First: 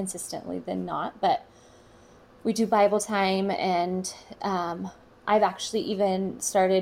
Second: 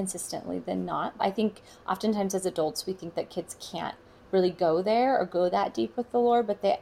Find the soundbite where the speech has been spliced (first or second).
second